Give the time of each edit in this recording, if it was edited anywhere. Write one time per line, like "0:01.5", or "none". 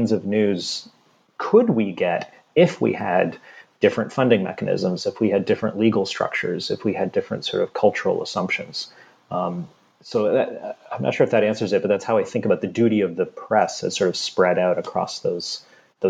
none